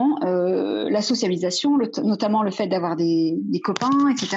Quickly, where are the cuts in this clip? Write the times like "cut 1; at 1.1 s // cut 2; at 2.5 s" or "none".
none